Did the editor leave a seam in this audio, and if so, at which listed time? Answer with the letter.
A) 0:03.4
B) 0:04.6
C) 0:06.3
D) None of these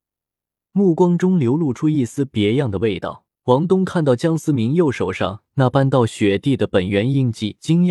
A